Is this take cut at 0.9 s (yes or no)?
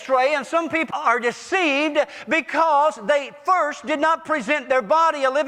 yes